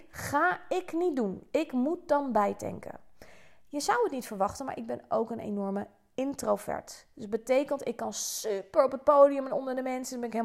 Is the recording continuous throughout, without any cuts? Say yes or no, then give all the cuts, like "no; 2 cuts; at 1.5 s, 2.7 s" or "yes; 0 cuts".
yes; 0 cuts